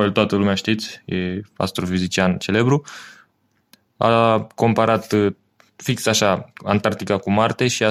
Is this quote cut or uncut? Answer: uncut